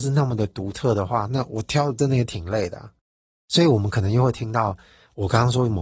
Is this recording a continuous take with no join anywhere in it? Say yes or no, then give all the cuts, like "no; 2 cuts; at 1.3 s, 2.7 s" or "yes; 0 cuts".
yes; 0 cuts